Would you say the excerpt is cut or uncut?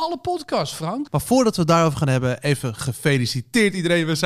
cut